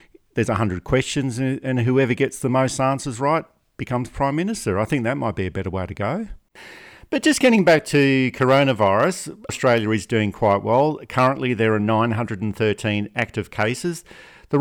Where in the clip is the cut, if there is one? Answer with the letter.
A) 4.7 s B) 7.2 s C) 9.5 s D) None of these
C